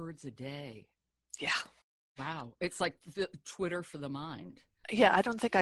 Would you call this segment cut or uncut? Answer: uncut